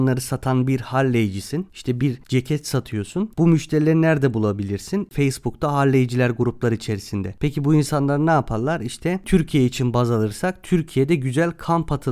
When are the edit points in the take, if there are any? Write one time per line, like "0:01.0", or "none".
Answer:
none